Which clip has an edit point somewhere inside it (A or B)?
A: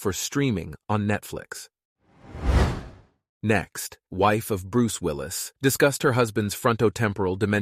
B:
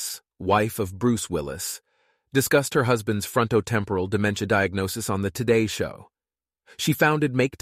A